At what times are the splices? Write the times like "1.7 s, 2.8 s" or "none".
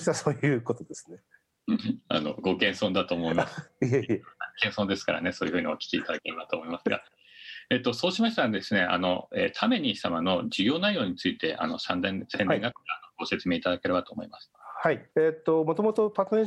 15.1 s